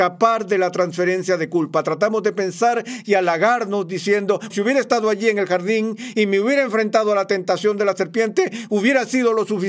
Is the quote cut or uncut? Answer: cut